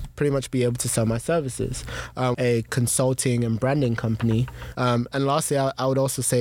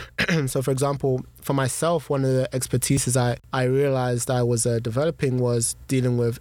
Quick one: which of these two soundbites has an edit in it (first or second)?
first